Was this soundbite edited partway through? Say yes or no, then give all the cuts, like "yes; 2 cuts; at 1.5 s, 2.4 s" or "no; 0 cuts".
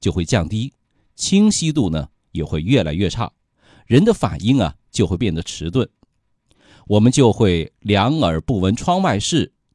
no; 0 cuts